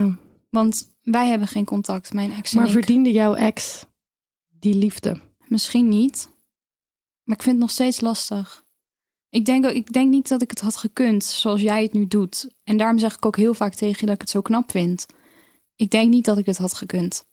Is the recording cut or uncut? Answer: uncut